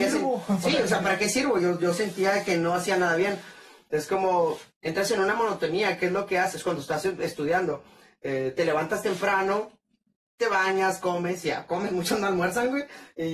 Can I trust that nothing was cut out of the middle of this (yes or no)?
yes